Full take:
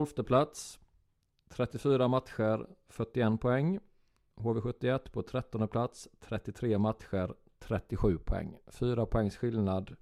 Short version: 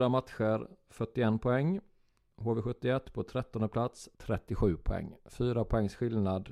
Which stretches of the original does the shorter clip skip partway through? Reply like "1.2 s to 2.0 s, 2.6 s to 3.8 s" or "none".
6.1 s to 7.6 s